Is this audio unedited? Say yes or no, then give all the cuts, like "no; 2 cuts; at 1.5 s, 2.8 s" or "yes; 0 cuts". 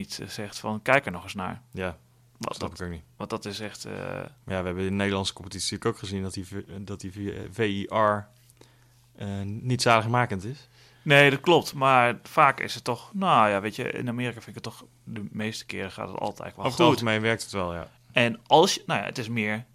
yes; 0 cuts